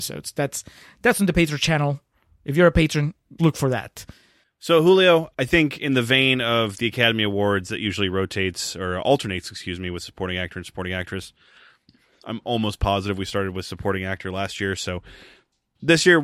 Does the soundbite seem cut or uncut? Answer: cut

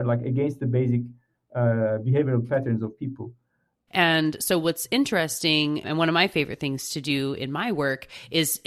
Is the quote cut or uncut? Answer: cut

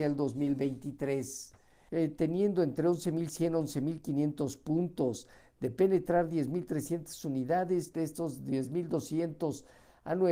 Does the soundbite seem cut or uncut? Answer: cut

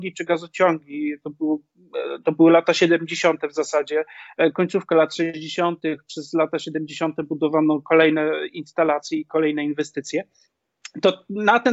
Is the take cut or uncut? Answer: uncut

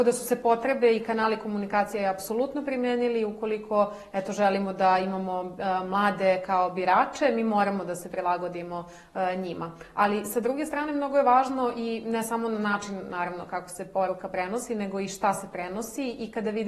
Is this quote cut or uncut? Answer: uncut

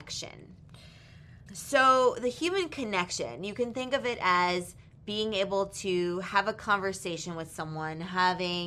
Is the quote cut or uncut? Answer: cut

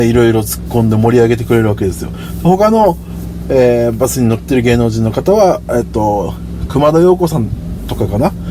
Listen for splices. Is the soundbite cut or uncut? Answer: uncut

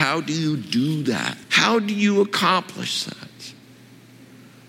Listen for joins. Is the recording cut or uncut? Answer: cut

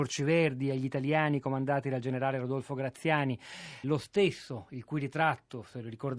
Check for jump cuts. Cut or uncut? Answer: cut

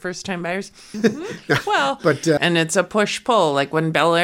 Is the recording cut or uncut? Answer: cut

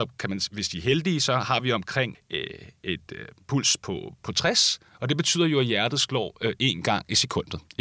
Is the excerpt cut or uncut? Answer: cut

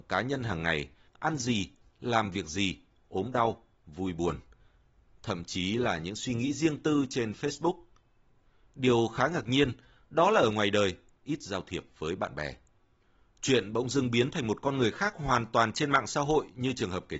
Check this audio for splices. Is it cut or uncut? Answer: cut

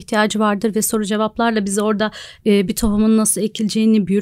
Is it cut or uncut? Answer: uncut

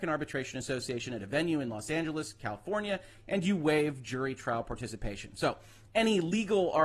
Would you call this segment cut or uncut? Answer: uncut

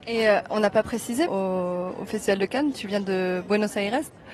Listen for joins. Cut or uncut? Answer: cut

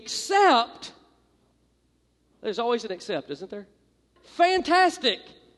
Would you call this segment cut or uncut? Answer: cut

